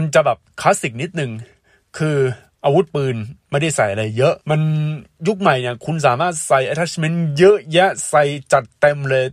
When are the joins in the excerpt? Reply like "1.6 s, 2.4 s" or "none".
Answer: 4.4 s